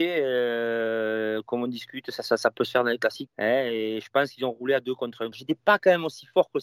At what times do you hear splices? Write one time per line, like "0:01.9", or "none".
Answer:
0:03.3
0:05.3